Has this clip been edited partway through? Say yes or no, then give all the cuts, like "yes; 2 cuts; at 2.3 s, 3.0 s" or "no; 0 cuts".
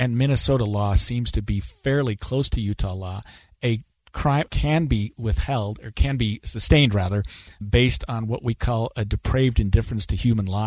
yes; 2 cuts; at 4.5 s, 7.6 s